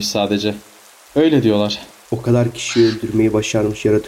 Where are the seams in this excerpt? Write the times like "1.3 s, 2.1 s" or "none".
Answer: 2.1 s